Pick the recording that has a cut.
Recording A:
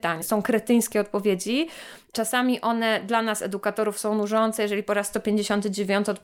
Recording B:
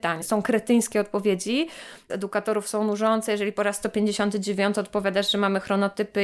B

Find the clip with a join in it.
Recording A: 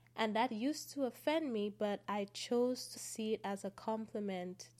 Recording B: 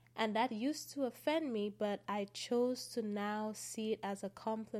A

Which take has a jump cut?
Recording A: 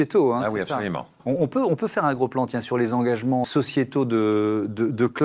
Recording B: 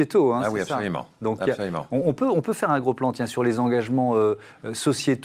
A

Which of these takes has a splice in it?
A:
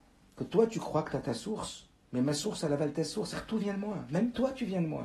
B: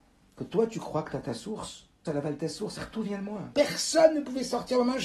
B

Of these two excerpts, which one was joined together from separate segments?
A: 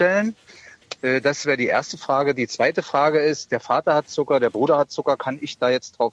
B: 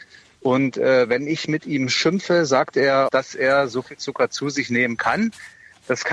B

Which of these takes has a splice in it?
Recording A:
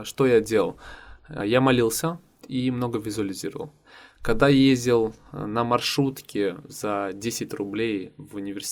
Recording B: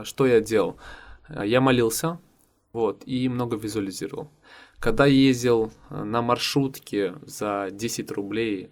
A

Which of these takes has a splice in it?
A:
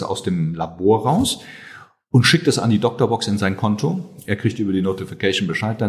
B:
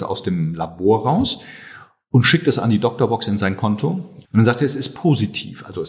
B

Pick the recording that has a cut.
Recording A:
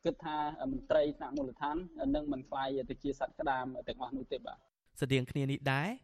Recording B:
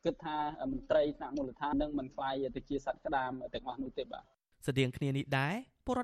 B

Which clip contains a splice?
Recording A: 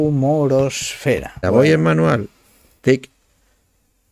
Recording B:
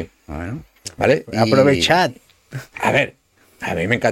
A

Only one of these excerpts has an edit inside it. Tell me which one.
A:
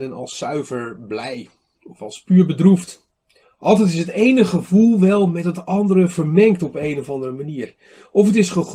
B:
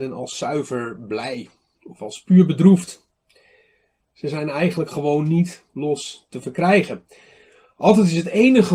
A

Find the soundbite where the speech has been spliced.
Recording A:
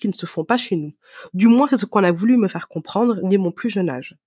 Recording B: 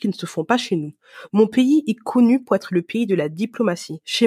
B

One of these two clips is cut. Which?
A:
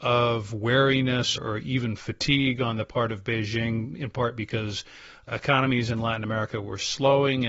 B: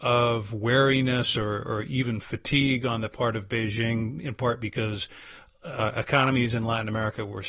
A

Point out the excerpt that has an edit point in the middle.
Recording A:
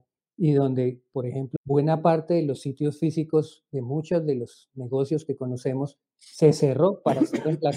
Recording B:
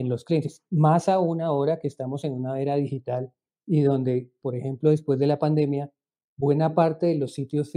A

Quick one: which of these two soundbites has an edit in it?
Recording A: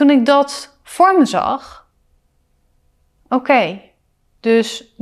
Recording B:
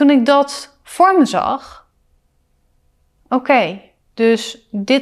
B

